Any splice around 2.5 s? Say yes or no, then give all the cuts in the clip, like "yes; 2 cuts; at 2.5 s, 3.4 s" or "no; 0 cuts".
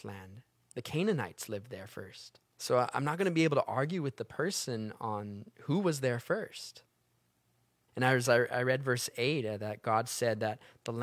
yes; 2 cuts; at 2.5 s, 7.9 s